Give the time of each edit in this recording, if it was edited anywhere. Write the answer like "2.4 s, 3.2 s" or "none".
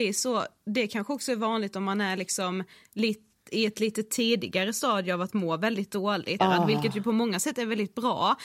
6.4 s